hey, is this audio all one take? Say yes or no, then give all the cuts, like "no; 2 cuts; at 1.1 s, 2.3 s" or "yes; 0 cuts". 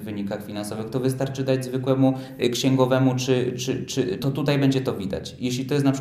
no; 1 cut; at 4.2 s